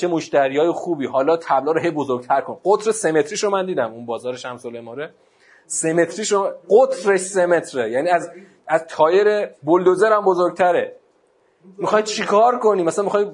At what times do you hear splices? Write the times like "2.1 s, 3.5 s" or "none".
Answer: 9.5 s